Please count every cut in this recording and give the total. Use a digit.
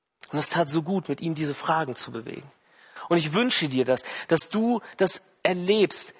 0